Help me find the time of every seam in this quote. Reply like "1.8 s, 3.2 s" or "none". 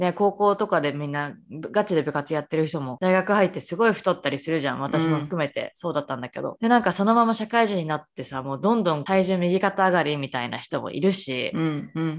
none